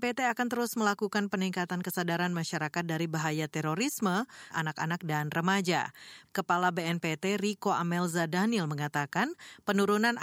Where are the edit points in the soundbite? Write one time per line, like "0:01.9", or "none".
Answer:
0:04.5
0:06.2